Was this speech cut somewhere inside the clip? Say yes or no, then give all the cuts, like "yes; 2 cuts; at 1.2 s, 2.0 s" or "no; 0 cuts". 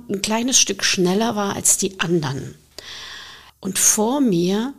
yes; 1 cut; at 3.5 s